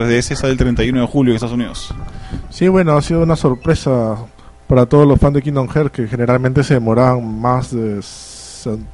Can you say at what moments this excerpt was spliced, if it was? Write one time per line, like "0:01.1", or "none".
none